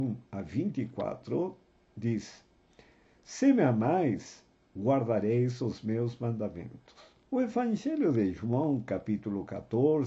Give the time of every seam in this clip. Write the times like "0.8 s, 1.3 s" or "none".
7.2 s